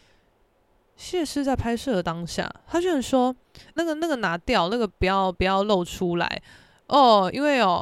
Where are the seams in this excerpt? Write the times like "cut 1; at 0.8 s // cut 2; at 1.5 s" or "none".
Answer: cut 1; at 3.8 s